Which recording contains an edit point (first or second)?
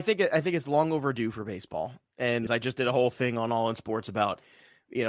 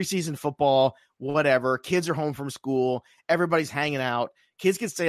first